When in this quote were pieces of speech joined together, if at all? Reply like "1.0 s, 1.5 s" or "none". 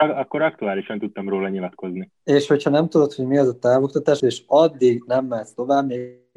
4.2 s